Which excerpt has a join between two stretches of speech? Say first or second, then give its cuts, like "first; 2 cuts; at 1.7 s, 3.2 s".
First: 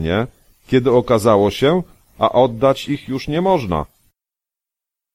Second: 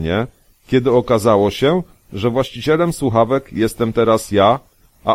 first; 1 cut; at 2.0 s